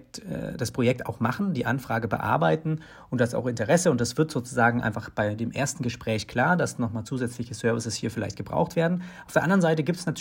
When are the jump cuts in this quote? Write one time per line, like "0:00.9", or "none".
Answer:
none